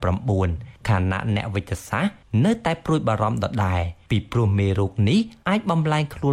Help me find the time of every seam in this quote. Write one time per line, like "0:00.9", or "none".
none